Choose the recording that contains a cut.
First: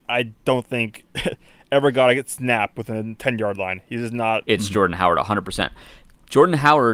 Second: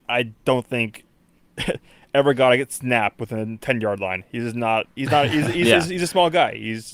first; 2 cuts; at 1.1 s, 4.4 s

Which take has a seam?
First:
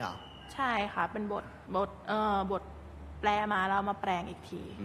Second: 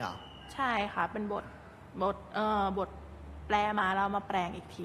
first; 1 cut; at 1.6 s

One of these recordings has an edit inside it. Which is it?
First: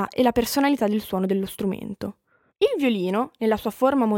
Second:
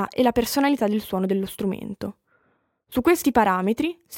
first; 1 cut; at 2.5 s

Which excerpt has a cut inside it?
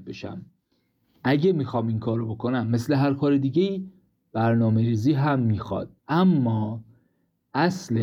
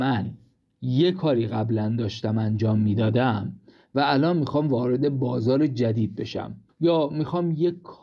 first; 1 cut; at 6.0 s

